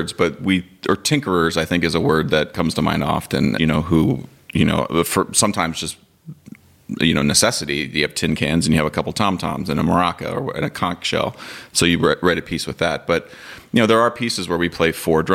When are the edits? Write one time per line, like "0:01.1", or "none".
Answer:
0:03.6